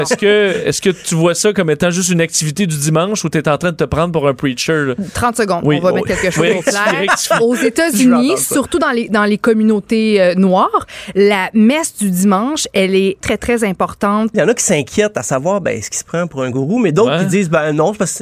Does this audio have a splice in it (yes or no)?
yes